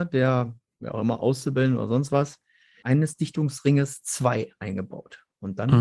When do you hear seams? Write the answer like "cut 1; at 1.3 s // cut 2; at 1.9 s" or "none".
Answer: cut 1; at 2.8 s